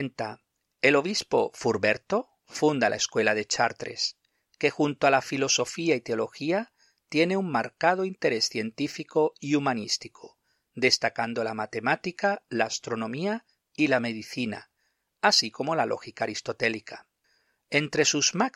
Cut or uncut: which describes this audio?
uncut